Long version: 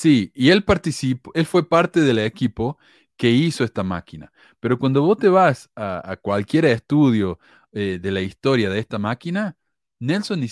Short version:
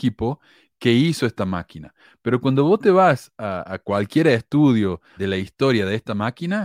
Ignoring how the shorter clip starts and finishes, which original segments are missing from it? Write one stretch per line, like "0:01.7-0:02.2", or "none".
0:07.5-0:08.0